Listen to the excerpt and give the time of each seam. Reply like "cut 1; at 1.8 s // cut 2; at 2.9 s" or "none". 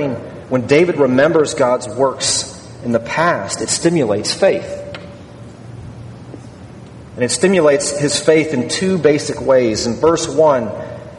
none